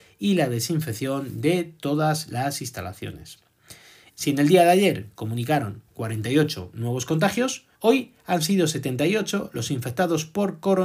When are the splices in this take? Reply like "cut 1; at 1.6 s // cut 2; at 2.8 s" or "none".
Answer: cut 1; at 4.1 s // cut 2; at 7.7 s